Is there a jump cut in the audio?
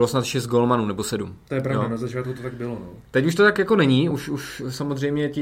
no; 0 cuts

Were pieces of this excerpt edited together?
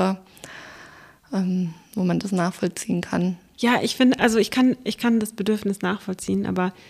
no; 0 cuts

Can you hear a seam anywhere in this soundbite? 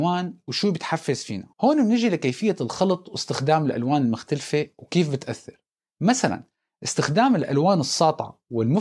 yes; 1 cut; at 1.5 s

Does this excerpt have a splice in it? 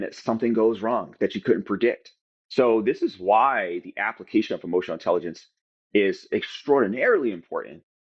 no; 0 cuts

